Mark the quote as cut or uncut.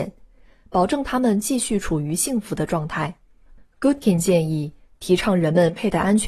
uncut